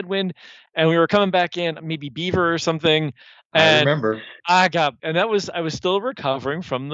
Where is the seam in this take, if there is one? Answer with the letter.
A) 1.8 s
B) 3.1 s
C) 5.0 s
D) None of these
C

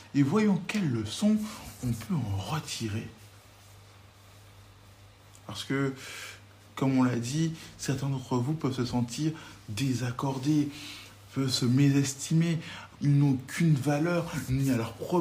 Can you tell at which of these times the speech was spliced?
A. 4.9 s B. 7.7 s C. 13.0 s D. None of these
C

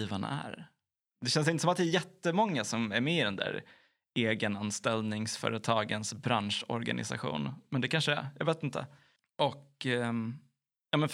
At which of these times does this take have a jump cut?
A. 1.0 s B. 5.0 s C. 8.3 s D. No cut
A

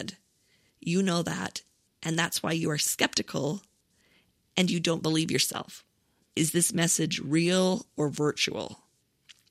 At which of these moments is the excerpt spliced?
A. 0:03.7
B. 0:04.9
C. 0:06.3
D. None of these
C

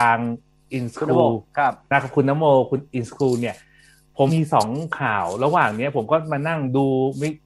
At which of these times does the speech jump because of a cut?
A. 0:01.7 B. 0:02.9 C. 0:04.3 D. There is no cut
C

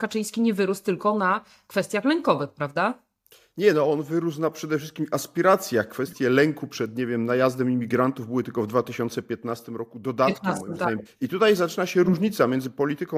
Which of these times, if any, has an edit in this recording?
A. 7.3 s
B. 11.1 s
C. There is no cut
B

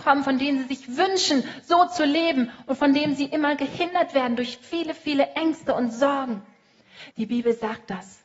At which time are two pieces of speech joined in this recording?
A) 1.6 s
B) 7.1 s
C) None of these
B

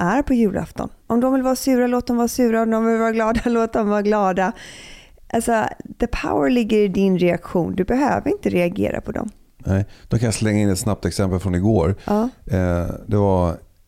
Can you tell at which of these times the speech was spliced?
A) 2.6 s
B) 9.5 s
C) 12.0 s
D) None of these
D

